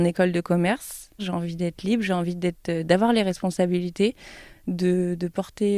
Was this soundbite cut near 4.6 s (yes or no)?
no